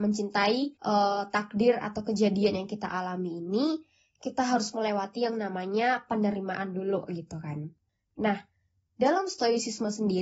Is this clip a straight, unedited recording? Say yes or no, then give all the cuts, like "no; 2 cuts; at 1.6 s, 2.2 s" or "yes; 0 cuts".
no; 1 cut; at 8.1 s